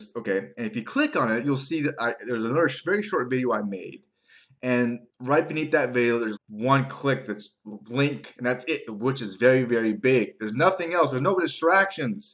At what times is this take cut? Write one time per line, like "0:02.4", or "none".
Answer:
0:05.1
0:06.4